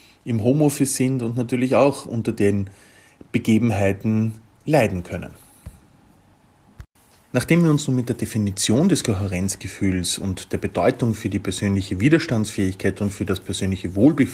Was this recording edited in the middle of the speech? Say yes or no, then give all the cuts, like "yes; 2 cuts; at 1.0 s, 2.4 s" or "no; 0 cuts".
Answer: no; 0 cuts